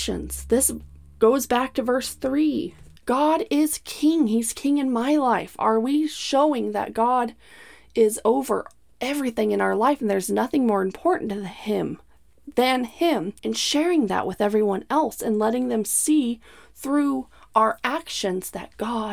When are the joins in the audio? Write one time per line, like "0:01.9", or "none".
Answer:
0:03.0
0:13.4

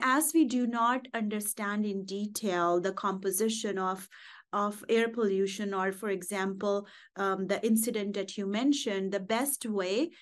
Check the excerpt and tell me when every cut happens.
none

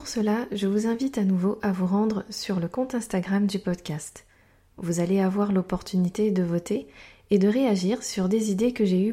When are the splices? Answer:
none

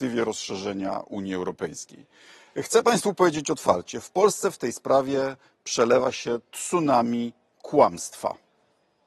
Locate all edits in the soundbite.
none

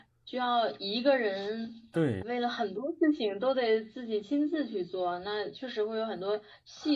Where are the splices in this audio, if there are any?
0:02.2

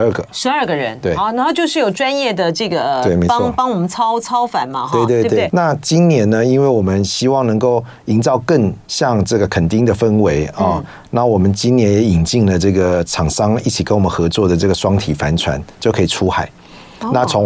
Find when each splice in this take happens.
0:05.5
0:08.8

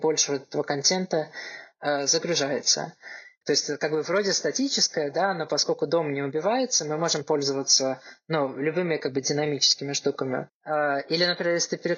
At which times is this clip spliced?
0:03.4
0:10.5

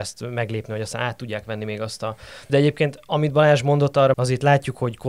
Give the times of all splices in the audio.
0:02.5
0:04.1

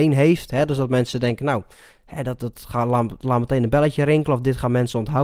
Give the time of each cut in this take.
0:02.4

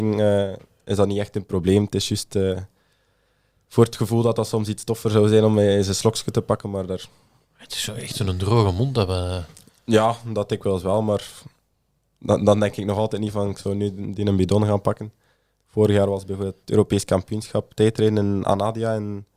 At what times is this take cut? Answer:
none

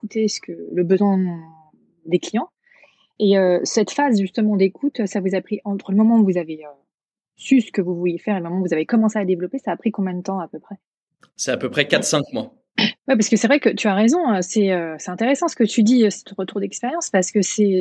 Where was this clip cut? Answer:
0:13.0

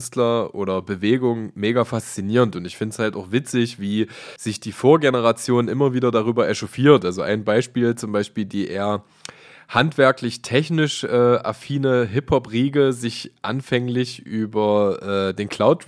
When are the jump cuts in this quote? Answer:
0:04.4

